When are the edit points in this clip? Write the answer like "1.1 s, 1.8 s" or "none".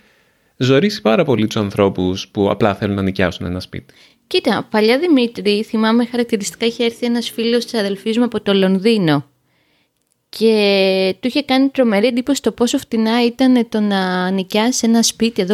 none

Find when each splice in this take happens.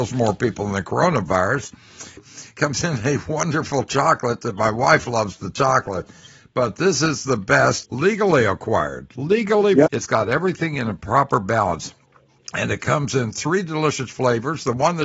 2.2 s, 7.8 s, 9.9 s

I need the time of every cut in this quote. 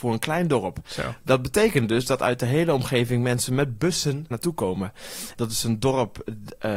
4.3 s, 5.3 s

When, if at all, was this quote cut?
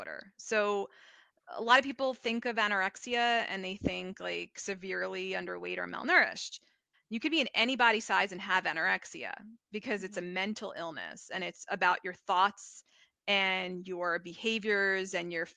6.9 s

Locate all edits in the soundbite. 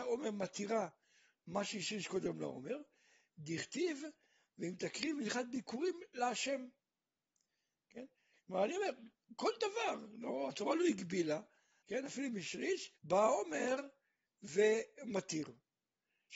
8.4 s, 11.8 s, 13.0 s

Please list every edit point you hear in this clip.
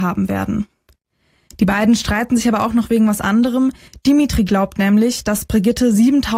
none

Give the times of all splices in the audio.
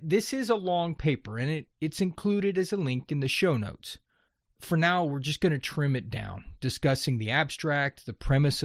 none

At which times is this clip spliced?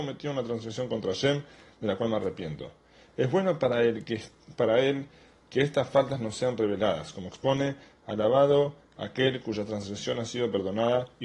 none

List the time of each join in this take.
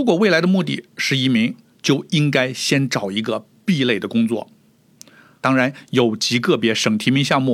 5.4 s

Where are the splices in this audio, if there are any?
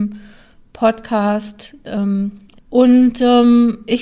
2.5 s

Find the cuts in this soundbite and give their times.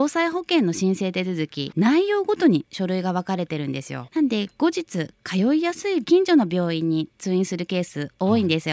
1.7 s, 4.1 s

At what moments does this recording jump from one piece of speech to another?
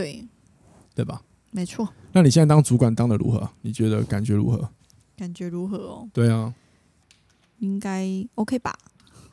none

